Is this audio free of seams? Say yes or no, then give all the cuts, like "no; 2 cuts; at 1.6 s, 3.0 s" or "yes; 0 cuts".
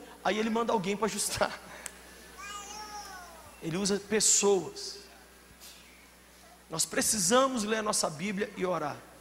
yes; 0 cuts